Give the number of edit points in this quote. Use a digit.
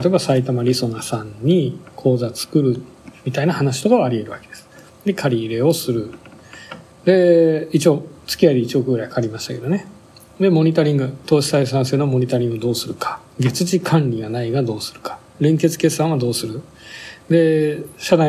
0